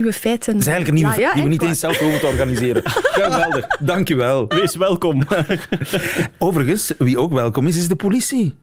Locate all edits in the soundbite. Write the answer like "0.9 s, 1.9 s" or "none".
1.2 s